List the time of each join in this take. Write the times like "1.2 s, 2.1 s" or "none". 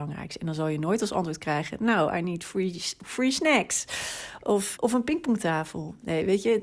4.8 s